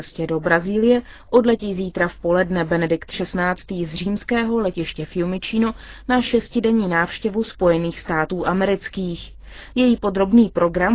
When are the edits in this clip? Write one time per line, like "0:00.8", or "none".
none